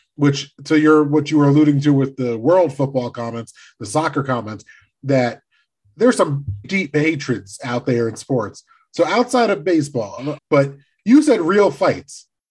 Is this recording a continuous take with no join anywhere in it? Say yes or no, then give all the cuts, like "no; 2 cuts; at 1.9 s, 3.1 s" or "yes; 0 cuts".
no; 2 cuts; at 6.6 s, 10.4 s